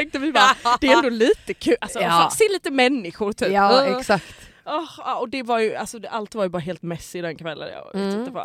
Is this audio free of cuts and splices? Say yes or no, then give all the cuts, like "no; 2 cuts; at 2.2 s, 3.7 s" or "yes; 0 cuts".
yes; 0 cuts